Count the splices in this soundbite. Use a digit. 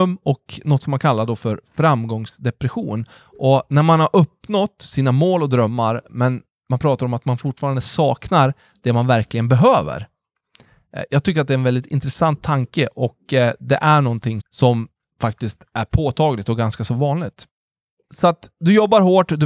1